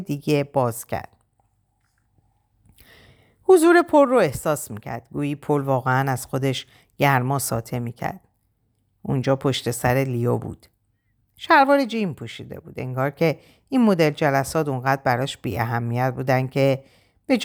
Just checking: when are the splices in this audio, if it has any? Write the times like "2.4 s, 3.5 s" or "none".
none